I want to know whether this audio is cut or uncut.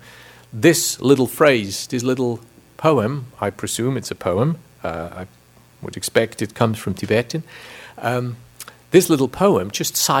uncut